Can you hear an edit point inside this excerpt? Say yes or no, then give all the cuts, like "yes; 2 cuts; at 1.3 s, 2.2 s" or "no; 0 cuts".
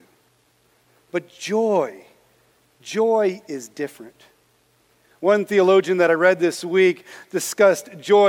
no; 0 cuts